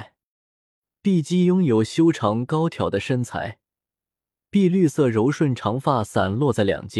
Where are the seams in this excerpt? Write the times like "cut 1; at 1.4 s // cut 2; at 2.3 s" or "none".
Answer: none